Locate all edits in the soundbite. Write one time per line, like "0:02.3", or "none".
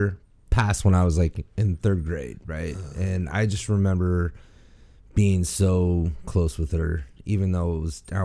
none